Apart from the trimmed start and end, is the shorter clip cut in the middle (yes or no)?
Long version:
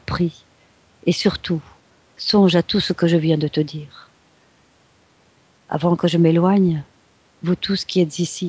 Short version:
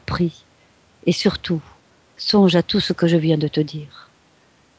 no